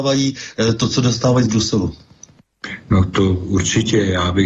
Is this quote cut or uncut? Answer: uncut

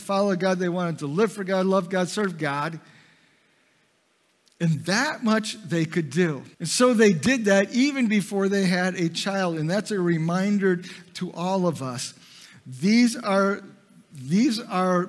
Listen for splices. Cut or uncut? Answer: cut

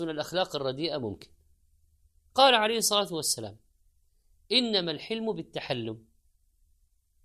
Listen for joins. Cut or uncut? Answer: uncut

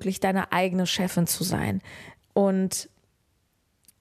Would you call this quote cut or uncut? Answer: cut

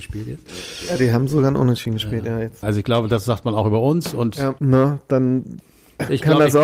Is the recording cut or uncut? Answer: cut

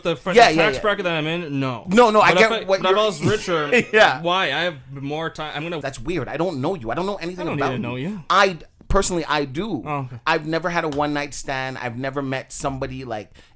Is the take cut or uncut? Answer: cut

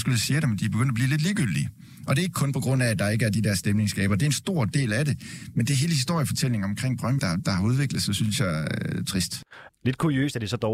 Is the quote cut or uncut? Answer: cut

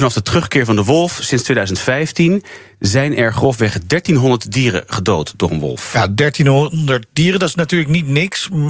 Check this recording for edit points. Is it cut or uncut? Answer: uncut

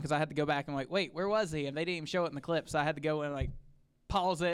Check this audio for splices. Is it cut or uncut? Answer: uncut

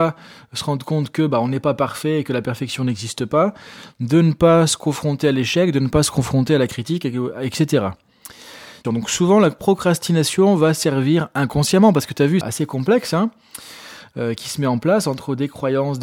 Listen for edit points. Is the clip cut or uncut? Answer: cut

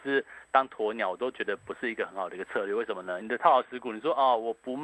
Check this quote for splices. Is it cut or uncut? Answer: cut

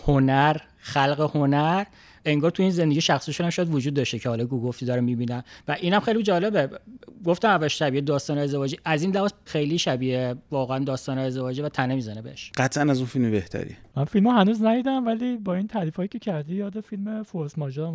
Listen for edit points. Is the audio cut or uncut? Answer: cut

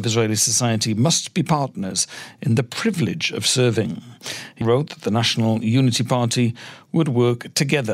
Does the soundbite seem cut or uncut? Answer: cut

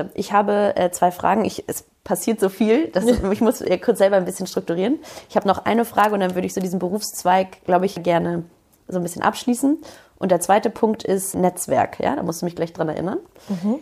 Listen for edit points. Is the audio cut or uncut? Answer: uncut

